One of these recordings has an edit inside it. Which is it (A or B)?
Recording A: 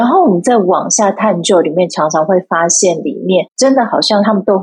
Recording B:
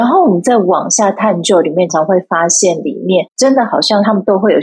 B